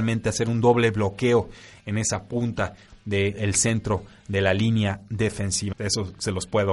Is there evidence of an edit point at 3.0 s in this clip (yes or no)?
no